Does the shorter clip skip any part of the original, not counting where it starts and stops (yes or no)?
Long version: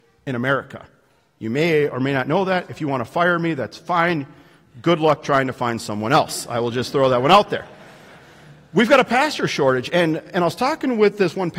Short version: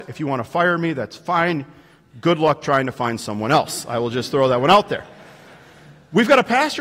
no